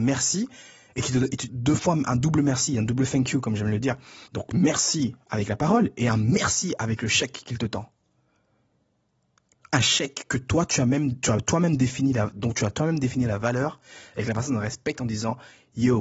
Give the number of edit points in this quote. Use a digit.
2